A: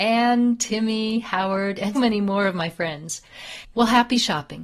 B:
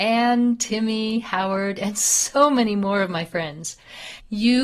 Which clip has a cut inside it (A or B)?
A